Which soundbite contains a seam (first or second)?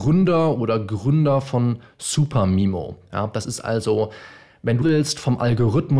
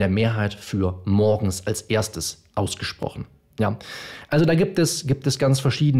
first